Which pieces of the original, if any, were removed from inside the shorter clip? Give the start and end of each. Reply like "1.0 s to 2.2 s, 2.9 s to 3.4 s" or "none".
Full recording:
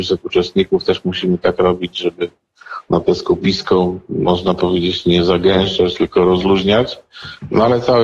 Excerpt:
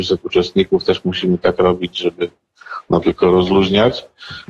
3.0 s to 6.0 s